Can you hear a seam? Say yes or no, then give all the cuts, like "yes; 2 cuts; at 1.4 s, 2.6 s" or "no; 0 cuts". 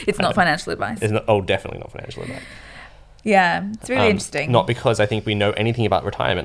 no; 0 cuts